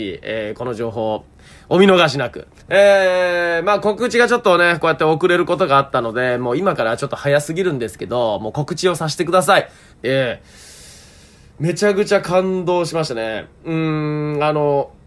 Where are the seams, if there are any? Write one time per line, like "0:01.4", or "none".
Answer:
0:02.6
0:09.9